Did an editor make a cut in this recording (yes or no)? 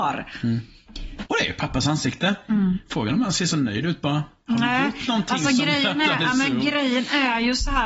yes